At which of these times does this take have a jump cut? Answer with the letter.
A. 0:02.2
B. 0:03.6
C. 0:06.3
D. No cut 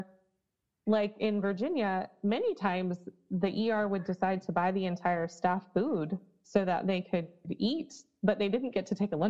D